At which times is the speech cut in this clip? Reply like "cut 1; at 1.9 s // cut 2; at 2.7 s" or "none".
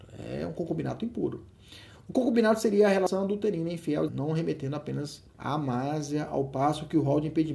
cut 1; at 4.1 s // cut 2; at 5.3 s